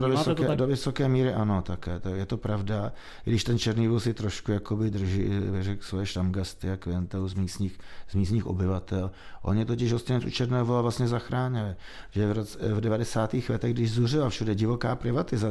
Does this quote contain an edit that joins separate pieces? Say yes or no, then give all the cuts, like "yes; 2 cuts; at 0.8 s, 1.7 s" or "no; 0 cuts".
no; 0 cuts